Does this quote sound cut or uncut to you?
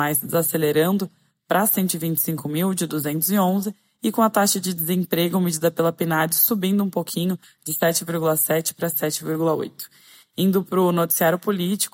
uncut